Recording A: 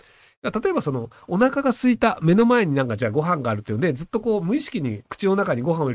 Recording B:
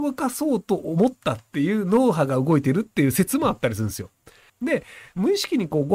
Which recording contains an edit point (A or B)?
B